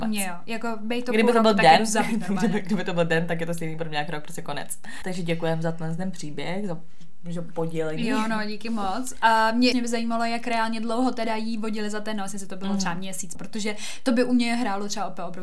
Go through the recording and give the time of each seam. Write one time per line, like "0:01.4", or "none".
0:05.0
0:09.7
0:13.3